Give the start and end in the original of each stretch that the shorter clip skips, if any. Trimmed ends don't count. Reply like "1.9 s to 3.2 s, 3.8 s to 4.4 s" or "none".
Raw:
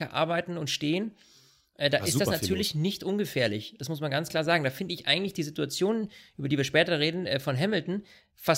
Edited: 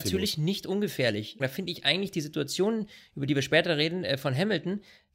3.8 s to 4.6 s